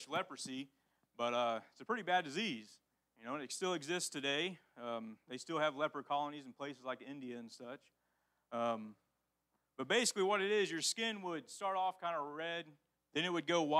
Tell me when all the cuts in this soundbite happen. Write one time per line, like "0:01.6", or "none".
none